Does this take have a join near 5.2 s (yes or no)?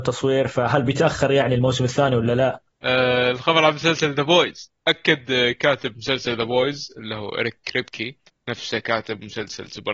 no